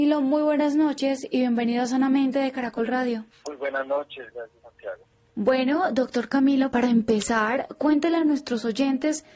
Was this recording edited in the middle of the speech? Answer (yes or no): yes